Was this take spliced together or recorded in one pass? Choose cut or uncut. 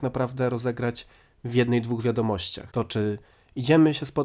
uncut